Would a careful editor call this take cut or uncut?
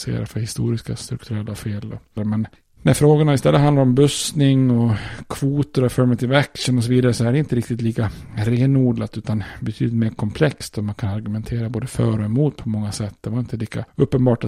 cut